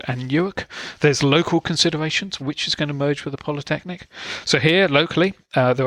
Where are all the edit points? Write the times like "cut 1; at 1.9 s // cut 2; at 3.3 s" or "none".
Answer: cut 1; at 1.0 s // cut 2; at 2.4 s